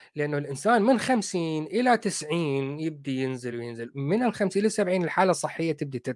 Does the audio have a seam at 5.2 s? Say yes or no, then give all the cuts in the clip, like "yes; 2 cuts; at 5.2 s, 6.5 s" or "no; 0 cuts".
no; 1 cut; at 3.5 s